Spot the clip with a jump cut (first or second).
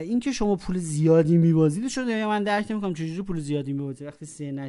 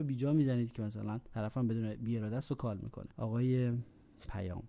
second